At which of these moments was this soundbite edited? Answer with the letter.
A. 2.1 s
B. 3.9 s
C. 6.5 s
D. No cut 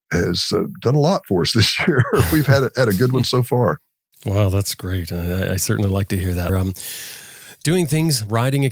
C